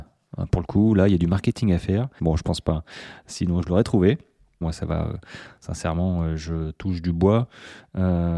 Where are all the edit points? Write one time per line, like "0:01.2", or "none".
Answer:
0:02.2
0:04.6